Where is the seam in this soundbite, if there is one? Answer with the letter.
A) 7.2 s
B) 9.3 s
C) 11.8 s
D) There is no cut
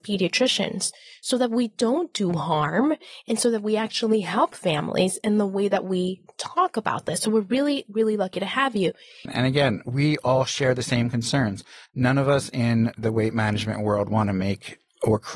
B